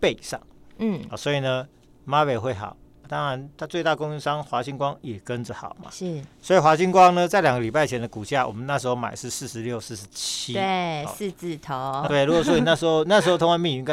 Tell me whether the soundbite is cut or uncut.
cut